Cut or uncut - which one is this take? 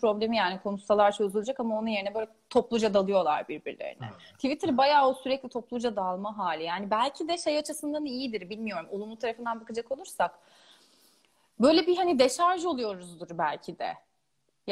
uncut